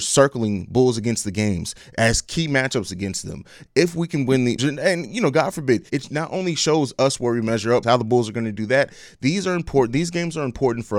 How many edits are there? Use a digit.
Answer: 3